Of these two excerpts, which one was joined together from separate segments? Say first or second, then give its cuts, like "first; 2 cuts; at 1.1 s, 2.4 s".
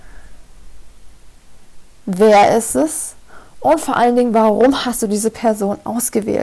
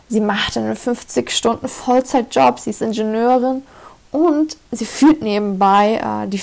first; 1 cut; at 1.9 s